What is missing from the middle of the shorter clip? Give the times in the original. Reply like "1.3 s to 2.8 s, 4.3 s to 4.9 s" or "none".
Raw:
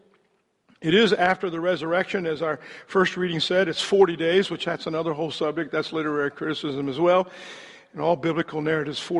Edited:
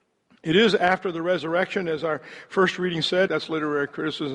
3.7 s to 5.7 s